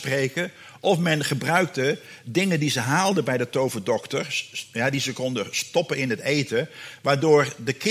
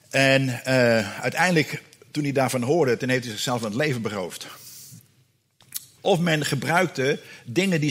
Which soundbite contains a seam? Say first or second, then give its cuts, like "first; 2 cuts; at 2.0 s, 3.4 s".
second; 1 cut; at 6.0 s